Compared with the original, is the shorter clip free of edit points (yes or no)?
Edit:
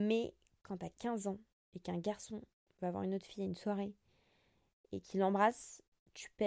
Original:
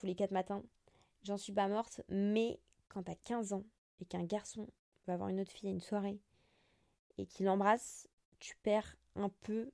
yes